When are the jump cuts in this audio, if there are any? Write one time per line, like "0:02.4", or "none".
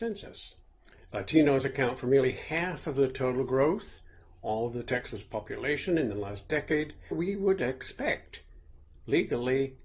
0:01.0
0:07.1